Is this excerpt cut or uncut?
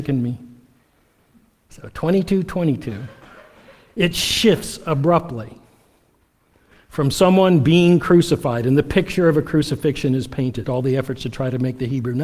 cut